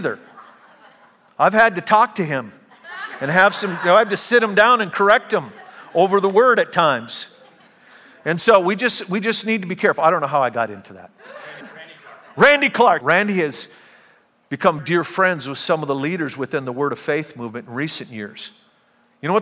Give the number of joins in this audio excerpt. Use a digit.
3